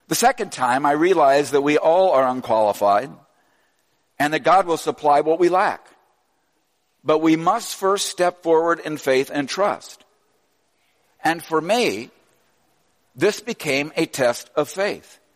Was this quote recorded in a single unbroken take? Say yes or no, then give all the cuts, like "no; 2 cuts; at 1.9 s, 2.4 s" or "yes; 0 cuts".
yes; 0 cuts